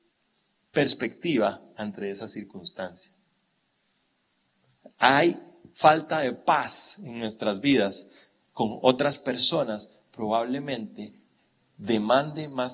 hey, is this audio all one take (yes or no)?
yes